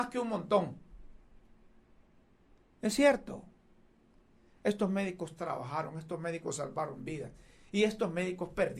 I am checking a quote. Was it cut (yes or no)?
no